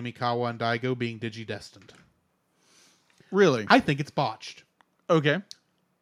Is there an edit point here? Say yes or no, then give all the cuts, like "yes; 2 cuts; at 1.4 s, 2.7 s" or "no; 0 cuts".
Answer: no; 0 cuts